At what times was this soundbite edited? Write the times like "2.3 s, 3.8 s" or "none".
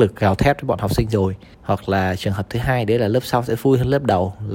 1.5 s